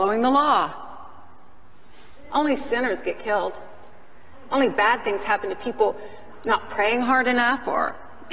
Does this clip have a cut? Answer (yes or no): yes